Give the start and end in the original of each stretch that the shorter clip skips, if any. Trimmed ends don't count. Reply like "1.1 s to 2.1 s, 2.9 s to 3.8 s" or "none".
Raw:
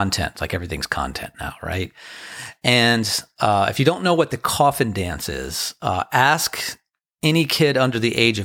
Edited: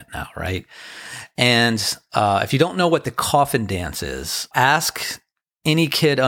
5.8 s to 6.1 s